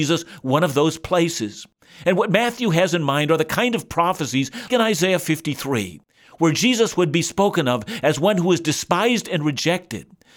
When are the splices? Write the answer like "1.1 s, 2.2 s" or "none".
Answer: 4.7 s